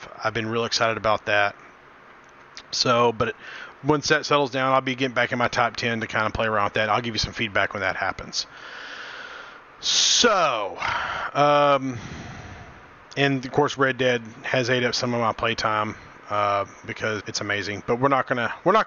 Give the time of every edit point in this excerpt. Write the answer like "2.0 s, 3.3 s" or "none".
17.2 s